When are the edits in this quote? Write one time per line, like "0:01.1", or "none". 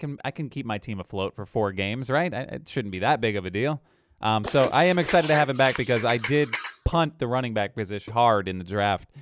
0:08.1